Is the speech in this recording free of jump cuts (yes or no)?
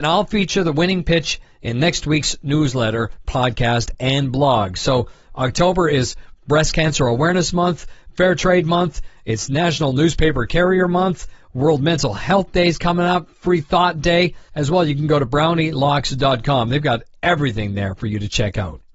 no